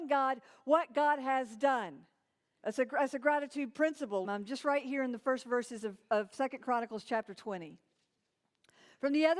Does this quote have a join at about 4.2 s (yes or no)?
yes